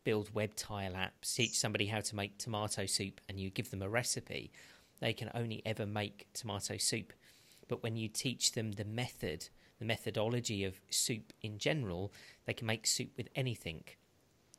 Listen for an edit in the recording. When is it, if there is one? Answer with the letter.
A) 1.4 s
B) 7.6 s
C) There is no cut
A